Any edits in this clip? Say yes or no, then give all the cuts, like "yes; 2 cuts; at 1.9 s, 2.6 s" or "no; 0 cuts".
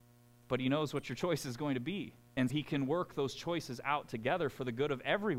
yes; 1 cut; at 2.5 s